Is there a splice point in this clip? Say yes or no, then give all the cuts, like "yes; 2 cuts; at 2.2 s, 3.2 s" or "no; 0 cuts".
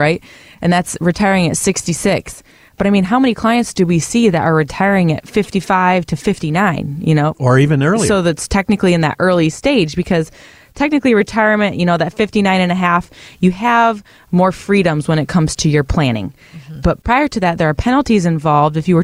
no; 0 cuts